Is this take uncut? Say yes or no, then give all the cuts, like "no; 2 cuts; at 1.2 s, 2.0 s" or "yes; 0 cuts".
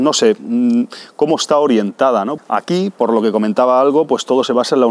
no; 1 cut; at 2.4 s